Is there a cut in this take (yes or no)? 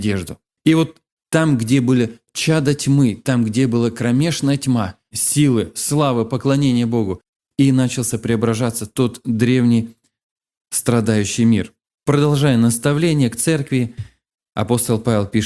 yes